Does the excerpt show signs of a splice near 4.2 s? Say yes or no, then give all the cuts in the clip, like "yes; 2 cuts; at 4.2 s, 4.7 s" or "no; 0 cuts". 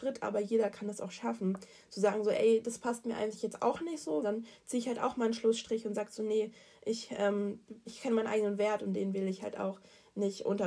yes; 2 cuts; at 4.2 s, 7.8 s